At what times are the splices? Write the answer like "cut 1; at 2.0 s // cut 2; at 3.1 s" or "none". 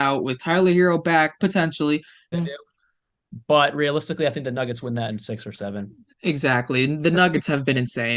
cut 1; at 2.3 s